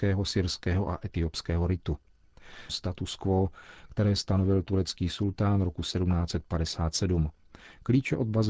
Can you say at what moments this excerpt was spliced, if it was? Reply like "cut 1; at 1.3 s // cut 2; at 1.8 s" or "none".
cut 1; at 2.7 s